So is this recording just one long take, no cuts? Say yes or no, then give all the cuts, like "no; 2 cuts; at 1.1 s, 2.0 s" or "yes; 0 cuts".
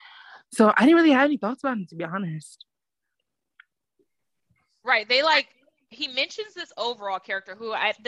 yes; 0 cuts